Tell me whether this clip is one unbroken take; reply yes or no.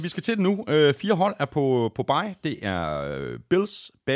yes